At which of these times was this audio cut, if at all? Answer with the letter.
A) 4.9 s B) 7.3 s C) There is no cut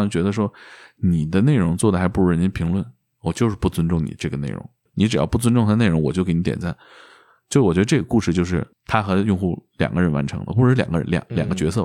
A